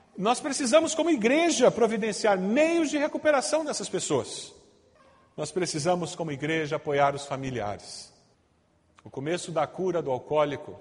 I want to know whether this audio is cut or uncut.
uncut